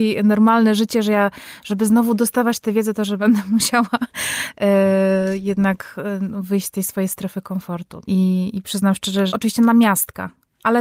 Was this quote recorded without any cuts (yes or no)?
no